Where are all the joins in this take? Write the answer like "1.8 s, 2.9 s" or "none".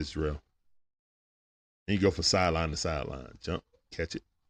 none